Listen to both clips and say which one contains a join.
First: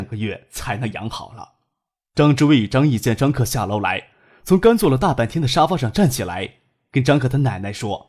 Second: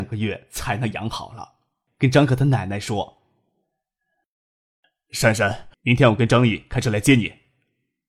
second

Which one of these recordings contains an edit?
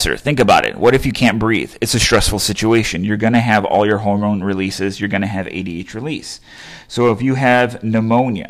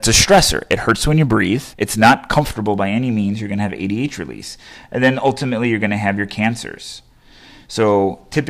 second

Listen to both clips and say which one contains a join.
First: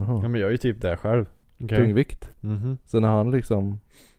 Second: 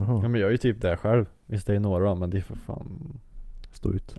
first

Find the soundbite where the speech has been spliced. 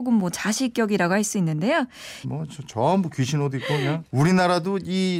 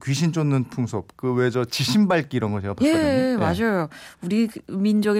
first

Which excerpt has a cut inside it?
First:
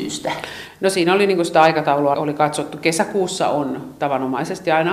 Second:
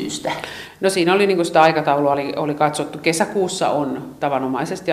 first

